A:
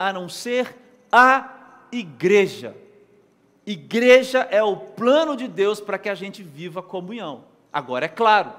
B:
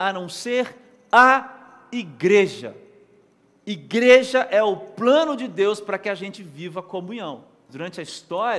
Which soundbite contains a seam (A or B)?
B